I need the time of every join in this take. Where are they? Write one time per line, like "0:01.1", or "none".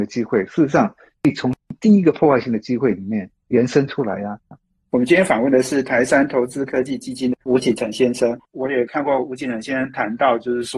0:04.5
0:08.5